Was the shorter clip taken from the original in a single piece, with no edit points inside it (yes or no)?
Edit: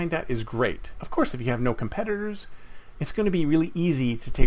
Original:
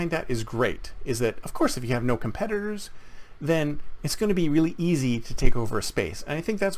no